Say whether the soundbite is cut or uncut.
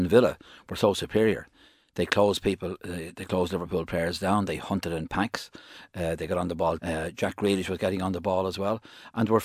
cut